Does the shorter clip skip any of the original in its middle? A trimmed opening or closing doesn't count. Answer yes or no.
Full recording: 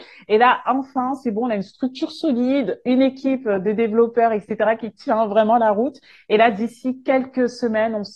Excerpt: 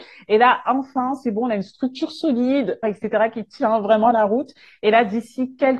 yes